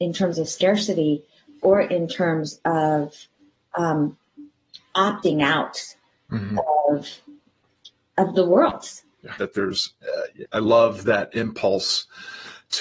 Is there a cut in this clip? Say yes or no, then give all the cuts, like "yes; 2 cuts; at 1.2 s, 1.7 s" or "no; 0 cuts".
yes; 2 cuts; at 9.4 s, 10.5 s